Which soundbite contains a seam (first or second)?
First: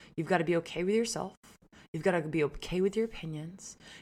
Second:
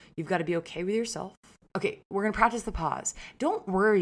second